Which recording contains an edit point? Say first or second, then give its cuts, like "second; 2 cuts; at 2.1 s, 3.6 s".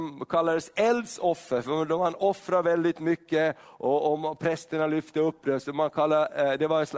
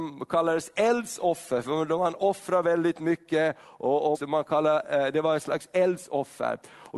second; 1 cut; at 4.1 s